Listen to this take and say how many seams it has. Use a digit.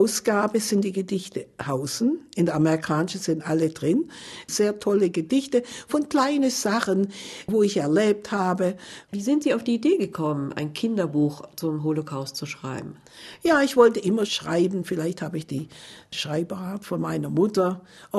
2